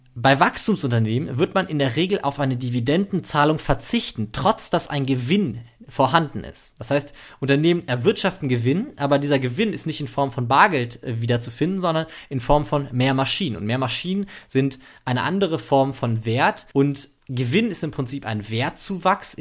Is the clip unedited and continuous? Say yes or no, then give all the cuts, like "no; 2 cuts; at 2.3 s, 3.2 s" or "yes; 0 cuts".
no; 1 cut; at 16.7 s